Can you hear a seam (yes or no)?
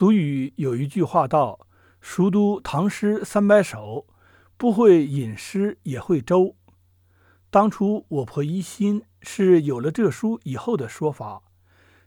no